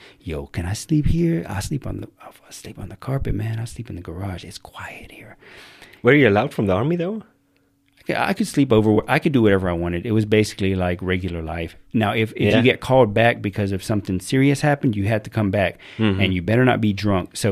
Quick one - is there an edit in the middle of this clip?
no; 0 cuts

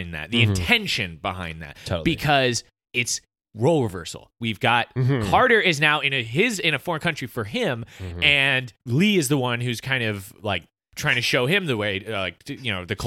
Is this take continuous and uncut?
no; 1 cut; at 8.8 s

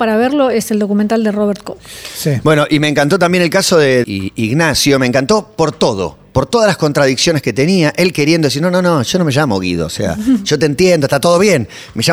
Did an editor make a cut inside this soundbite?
yes; 1 cut; at 4.0 s

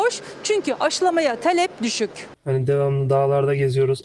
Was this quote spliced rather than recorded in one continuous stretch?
yes; 1 cut; at 2.4 s

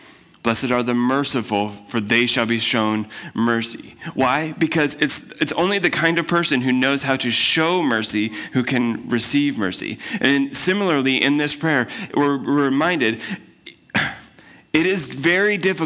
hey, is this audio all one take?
yes; 0 cuts

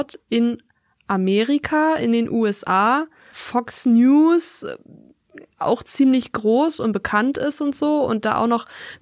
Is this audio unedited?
no; 1 cut; at 3.3 s

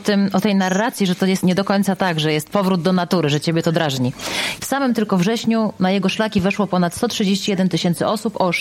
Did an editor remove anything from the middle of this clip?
yes; 2 cuts; at 1.4 s, 4.6 s

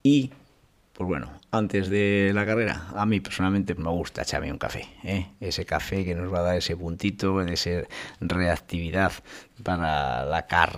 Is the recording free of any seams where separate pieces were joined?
no; 1 cut; at 3.8 s

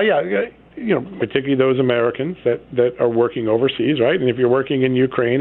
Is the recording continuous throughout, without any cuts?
no; 1 cut; at 1.2 s

